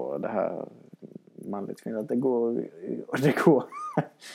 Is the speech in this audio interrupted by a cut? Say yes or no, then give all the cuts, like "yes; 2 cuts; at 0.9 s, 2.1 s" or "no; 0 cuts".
no; 0 cuts